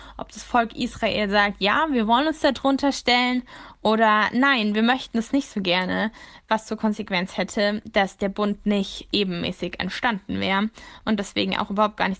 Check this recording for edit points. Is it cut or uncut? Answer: uncut